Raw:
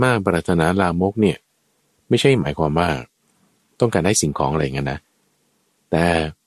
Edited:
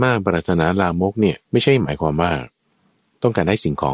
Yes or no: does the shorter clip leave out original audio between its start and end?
yes